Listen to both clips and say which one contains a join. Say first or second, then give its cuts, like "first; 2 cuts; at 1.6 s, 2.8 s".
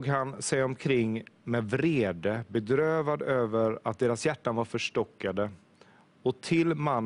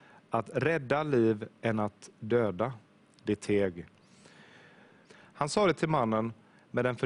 second; 1 cut; at 5.0 s